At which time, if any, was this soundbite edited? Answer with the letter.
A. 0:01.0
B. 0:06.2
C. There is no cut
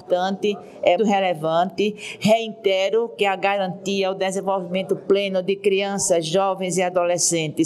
A